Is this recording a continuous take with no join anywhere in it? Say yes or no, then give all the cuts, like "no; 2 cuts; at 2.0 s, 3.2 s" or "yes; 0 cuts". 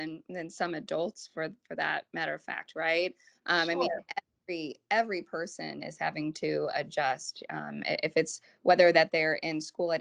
yes; 0 cuts